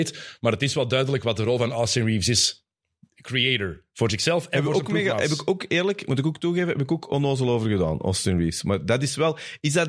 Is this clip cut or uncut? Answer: uncut